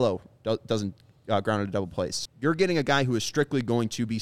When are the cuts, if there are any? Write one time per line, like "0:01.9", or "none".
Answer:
0:02.3